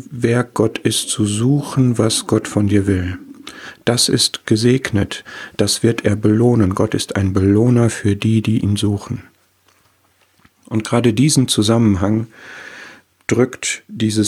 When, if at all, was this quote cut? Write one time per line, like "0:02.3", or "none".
none

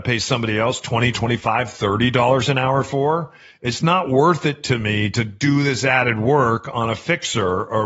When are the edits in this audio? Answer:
none

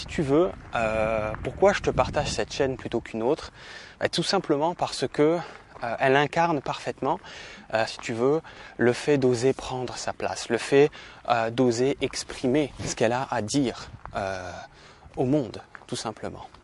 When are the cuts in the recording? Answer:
0:07.9
0:12.8

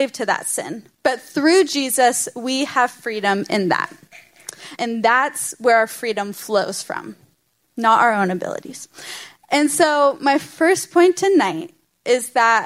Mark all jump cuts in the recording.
0:04.8

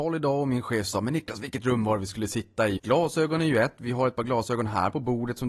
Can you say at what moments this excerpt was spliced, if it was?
0:02.8

